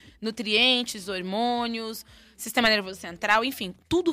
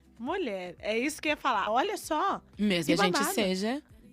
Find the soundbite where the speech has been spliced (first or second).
second